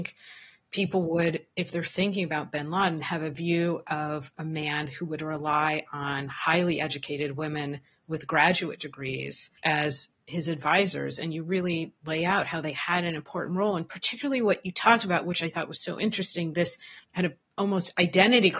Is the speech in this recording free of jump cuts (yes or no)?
no